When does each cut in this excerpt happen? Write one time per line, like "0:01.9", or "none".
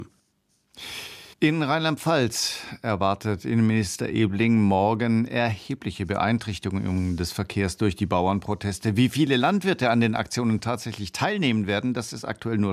0:01.3